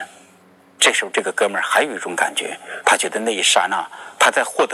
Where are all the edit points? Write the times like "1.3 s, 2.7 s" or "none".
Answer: none